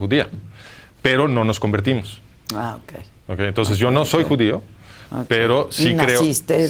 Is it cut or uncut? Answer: uncut